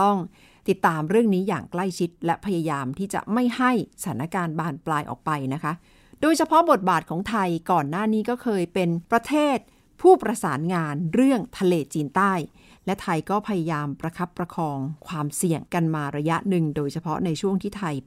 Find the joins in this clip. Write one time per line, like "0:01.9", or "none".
0:09.0
0:15.7